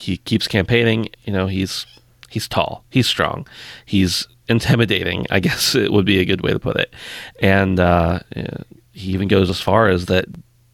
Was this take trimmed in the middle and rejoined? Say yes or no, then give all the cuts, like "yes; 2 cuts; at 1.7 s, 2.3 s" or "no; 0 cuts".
yes; 1 cut; at 1.1 s